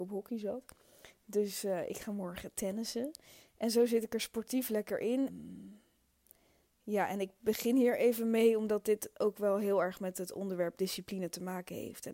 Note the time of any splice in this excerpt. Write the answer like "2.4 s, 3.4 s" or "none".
5.3 s